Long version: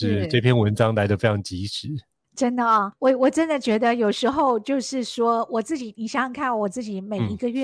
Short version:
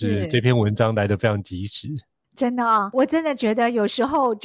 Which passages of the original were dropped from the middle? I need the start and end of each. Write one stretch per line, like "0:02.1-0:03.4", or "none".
0:02.9-0:03.2